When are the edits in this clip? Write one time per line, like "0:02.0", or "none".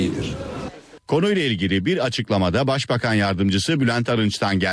0:01.0